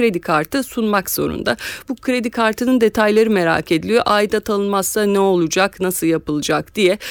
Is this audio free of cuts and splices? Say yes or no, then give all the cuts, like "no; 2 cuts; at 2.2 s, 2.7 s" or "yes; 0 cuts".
yes; 0 cuts